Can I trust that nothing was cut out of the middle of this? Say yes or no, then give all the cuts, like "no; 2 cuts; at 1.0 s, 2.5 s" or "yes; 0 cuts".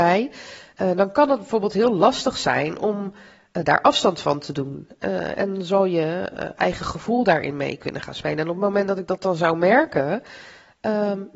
yes; 0 cuts